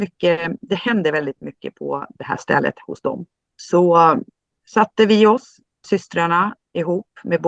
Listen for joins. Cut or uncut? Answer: uncut